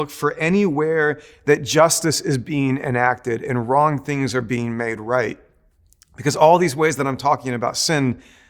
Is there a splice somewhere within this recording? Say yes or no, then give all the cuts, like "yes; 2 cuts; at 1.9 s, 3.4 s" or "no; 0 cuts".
no; 0 cuts